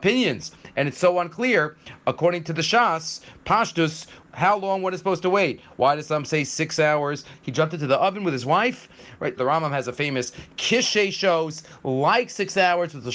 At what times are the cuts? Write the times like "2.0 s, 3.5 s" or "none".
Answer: 7.3 s, 9.4 s